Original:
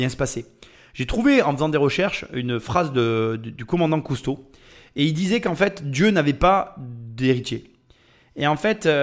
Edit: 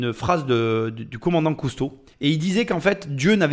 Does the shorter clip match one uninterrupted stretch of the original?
no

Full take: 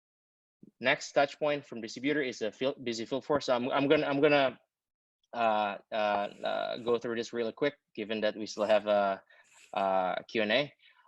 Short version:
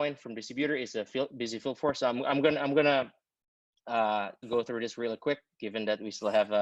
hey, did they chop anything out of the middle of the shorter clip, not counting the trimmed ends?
yes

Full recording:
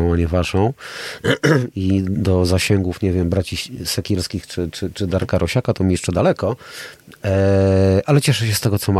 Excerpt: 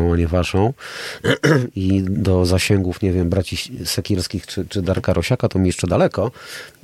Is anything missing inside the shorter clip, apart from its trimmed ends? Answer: yes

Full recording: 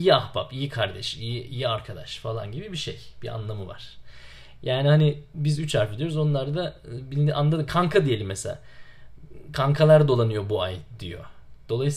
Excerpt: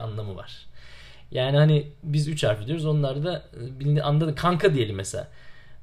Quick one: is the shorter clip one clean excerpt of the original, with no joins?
yes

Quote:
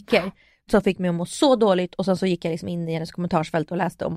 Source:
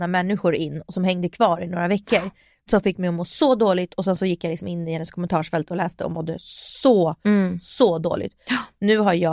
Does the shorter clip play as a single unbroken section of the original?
yes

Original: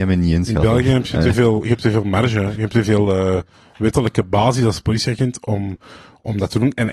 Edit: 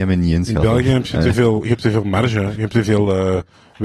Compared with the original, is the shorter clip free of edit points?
yes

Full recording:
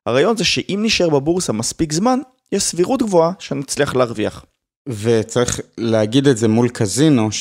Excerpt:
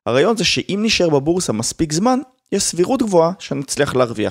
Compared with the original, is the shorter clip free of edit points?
yes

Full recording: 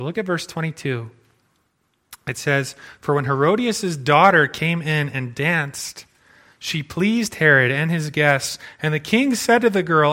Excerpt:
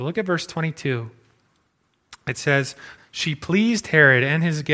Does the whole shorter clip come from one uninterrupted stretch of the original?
no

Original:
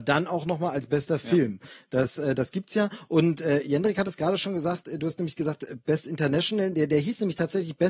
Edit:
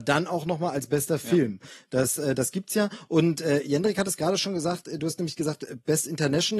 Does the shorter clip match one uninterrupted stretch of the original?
yes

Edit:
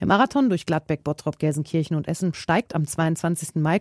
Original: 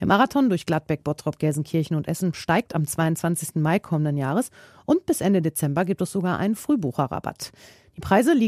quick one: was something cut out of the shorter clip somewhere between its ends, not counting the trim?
no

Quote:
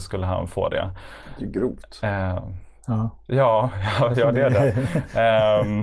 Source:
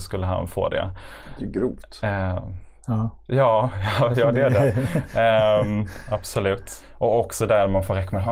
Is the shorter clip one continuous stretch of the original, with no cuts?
yes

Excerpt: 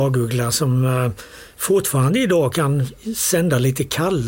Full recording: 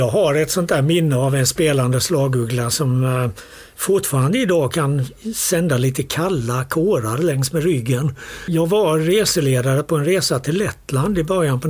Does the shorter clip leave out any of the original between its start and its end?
no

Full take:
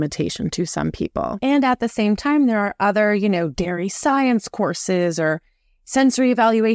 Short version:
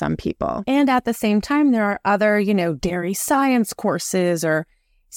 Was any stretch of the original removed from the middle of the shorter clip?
no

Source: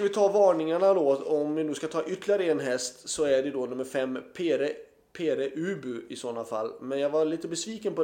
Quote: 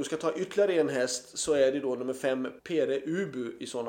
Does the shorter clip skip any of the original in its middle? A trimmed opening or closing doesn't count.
yes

